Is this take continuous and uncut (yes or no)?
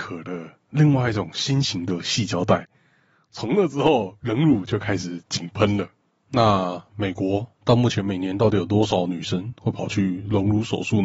yes